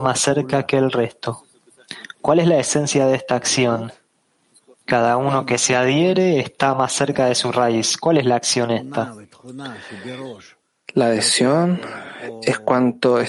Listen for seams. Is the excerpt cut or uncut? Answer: uncut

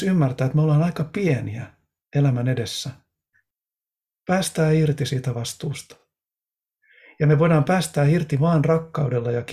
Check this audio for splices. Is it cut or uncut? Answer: uncut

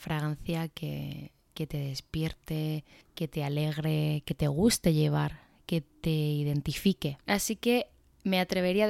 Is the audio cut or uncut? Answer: cut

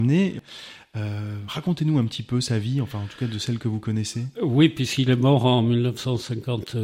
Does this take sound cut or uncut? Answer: uncut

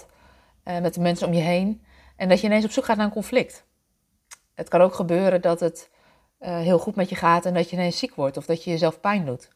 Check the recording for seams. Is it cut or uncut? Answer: uncut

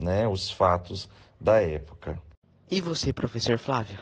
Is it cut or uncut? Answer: uncut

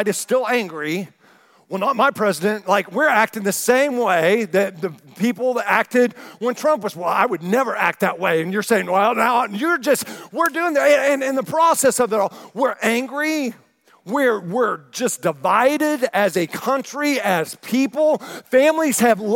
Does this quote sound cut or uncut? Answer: uncut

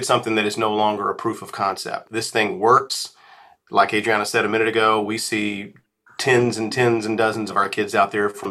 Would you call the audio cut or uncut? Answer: uncut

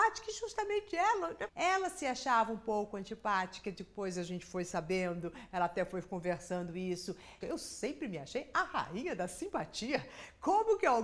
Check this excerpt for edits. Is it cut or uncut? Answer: cut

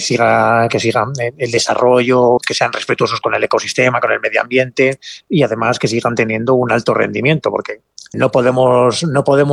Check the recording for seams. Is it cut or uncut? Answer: cut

